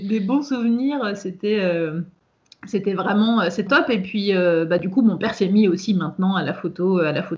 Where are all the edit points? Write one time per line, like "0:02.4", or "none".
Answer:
0:03.7

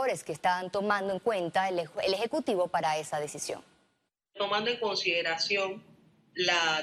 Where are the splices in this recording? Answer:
none

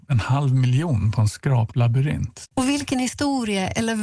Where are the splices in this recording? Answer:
0:02.5

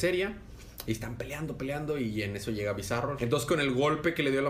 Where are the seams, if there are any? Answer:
0:03.2

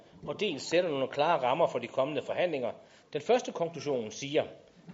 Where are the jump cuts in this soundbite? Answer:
0:03.0

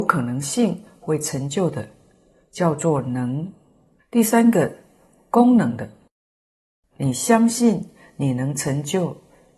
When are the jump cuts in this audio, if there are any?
0:04.0
0:06.9

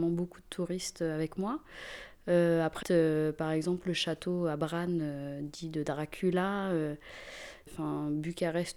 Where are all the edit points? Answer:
0:02.8
0:07.7

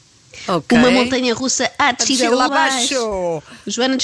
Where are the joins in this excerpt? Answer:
0:02.5

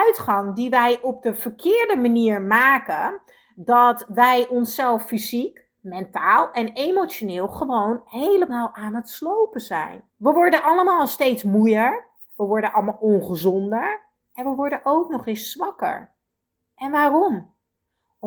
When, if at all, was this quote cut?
0:10.1
0:12.3

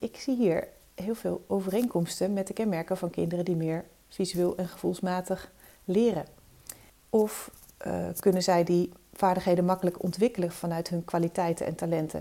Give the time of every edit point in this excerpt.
0:06.9

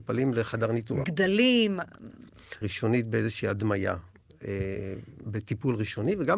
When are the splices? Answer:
0:01.0
0:02.6
0:05.2

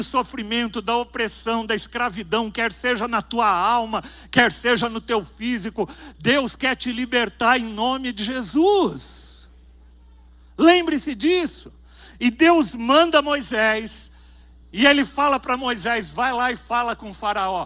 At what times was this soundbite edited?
none

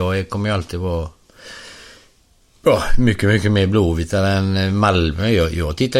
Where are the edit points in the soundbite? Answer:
none

